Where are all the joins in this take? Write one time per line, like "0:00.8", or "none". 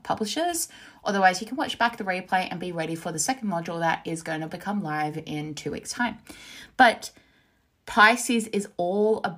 none